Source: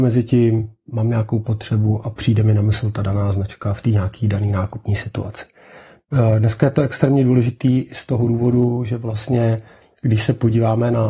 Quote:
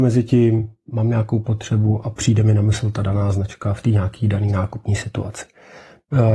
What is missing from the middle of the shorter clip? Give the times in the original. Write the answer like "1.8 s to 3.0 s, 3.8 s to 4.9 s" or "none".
none